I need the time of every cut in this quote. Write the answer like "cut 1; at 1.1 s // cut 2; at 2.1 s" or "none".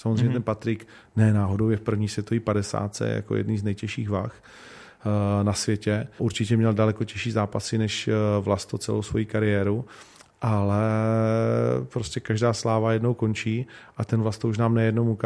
cut 1; at 6.2 s

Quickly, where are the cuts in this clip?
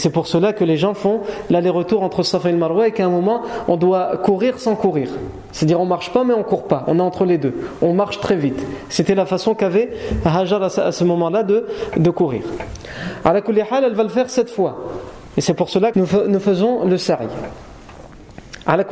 cut 1; at 15.9 s

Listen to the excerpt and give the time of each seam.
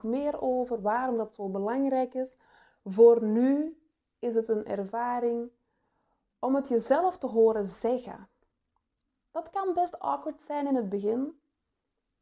none

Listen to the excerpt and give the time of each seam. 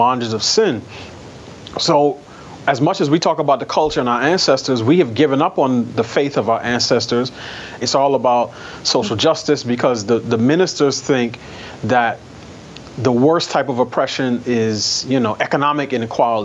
cut 1; at 7.8 s // cut 2; at 14.4 s

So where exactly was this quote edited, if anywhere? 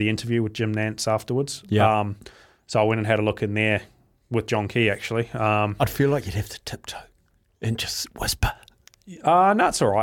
none

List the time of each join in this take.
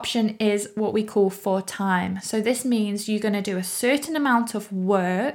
none

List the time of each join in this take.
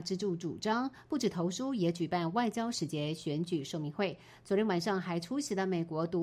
none

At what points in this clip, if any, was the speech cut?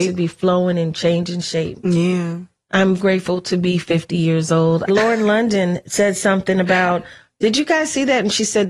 cut 1; at 3.0 s // cut 2; at 4.9 s

